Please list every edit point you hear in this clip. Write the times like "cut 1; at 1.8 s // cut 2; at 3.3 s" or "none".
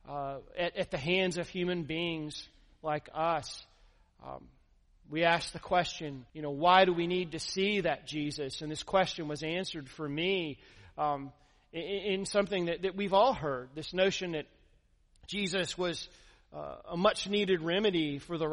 cut 1; at 6.3 s